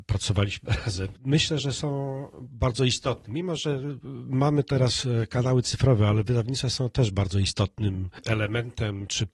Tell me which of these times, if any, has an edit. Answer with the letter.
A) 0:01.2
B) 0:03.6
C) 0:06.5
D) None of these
D